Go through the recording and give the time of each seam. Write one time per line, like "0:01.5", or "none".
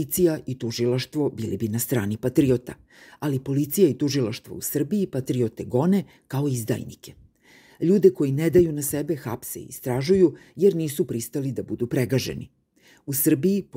none